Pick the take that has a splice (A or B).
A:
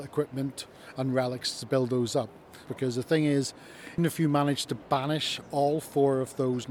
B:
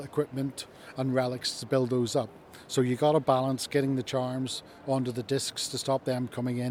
A